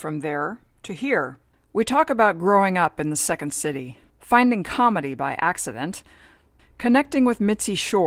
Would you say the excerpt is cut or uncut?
cut